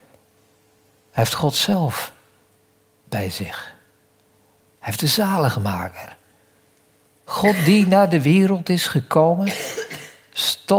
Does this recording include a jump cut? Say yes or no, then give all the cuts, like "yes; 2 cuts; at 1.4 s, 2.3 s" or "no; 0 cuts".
no; 0 cuts